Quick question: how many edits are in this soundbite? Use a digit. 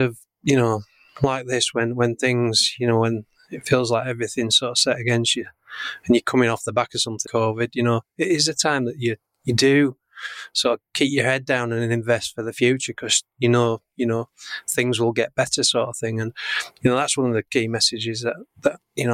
1